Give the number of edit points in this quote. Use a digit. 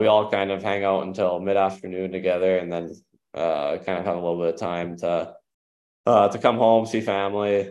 0